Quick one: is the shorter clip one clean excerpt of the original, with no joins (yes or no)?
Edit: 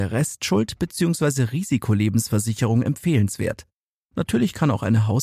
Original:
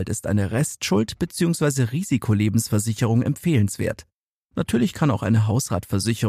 yes